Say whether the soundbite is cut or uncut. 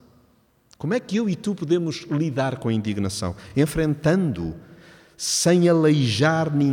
uncut